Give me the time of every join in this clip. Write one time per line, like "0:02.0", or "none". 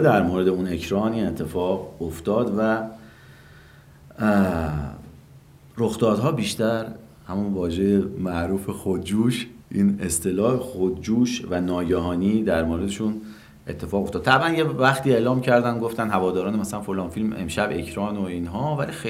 0:09.6